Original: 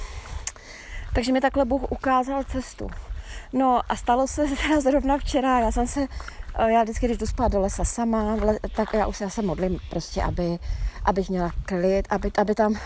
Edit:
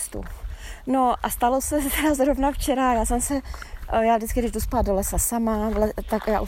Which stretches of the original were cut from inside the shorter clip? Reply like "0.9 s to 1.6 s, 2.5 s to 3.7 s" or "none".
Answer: none